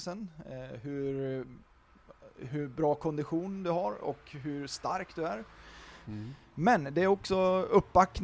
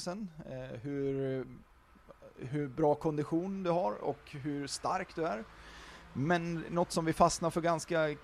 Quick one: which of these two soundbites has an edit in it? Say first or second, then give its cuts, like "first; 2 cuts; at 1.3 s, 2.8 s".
first; 1 cut; at 6.0 s